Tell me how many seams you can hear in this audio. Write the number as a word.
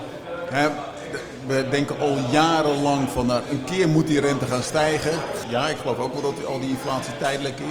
one